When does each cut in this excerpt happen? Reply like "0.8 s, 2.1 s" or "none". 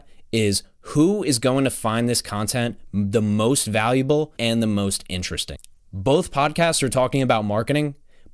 4.4 s, 5.8 s